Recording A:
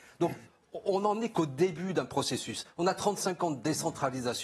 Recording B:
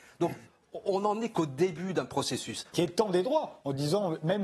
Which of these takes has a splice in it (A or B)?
B